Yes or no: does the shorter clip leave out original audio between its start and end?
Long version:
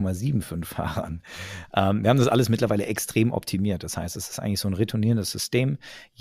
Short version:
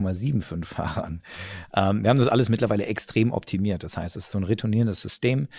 yes